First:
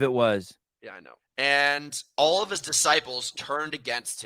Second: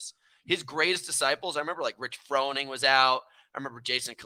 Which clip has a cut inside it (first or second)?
first